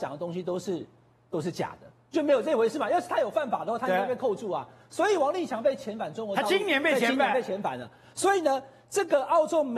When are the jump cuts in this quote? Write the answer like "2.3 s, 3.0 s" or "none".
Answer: none